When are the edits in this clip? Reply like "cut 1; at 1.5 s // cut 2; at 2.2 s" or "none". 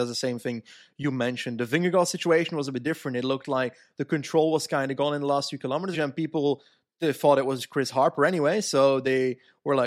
cut 1; at 5.9 s